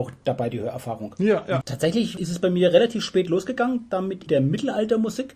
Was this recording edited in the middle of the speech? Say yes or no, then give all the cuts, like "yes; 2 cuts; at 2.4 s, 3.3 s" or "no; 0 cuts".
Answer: yes; 2 cuts; at 1.6 s, 4.3 s